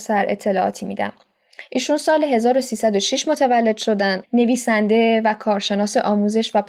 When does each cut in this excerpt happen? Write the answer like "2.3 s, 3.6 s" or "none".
4.2 s